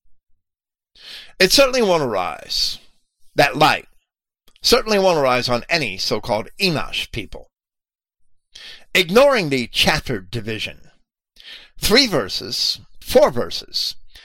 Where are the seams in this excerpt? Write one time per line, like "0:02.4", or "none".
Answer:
0:13.0